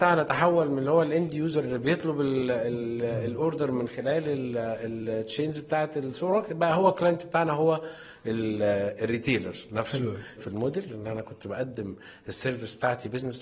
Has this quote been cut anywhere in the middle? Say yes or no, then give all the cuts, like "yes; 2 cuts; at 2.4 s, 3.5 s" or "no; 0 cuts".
yes; 1 cut; at 10.4 s